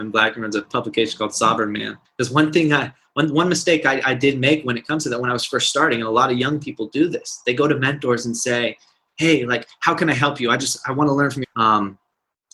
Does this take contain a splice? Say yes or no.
yes